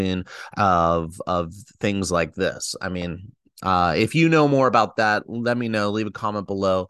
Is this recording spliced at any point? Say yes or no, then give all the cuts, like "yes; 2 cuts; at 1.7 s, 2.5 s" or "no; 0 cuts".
no; 0 cuts